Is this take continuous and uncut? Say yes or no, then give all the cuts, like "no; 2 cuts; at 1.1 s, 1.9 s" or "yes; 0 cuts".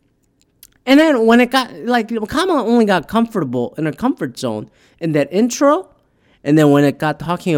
yes; 0 cuts